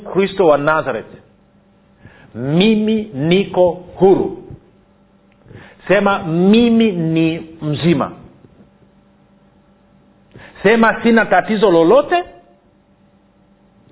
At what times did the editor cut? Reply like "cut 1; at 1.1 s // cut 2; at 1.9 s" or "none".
none